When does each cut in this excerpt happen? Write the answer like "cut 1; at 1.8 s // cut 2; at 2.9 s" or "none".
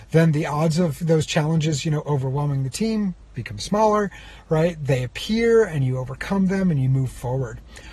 none